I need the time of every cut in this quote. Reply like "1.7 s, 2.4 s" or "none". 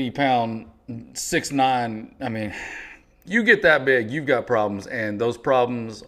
3.3 s